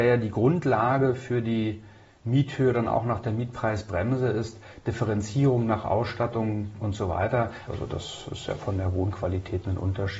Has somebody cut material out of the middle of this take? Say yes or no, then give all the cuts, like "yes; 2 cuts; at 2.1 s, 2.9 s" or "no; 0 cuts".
yes; 1 cut; at 7.7 s